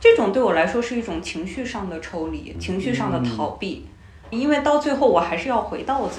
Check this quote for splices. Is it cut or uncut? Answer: cut